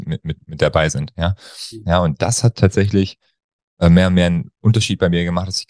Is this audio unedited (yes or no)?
no